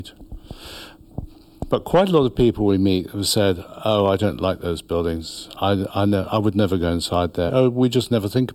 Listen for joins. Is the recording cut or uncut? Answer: cut